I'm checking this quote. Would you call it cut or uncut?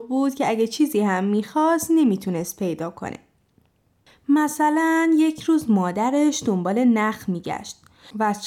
uncut